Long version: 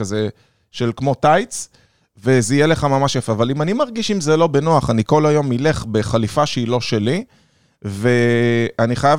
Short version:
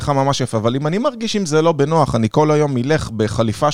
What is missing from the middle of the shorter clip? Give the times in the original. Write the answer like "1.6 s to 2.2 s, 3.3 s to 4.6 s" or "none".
none